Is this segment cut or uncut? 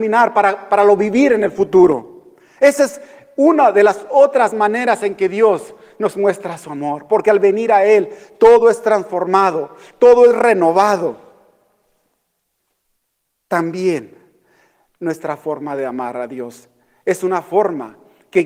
uncut